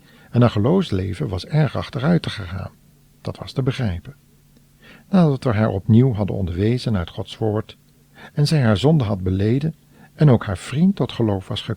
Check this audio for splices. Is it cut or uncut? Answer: uncut